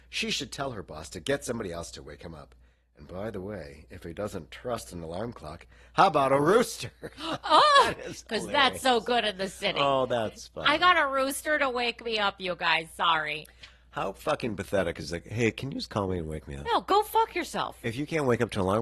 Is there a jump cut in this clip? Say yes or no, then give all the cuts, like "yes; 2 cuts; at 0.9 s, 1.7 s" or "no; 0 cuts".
no; 0 cuts